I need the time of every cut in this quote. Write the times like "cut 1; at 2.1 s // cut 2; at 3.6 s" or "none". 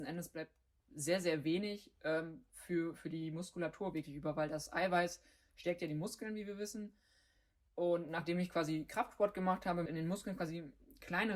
cut 1; at 9.9 s